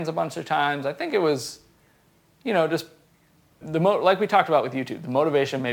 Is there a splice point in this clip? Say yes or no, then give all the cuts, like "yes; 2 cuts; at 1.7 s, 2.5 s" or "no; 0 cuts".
yes; 1 cut; at 3.6 s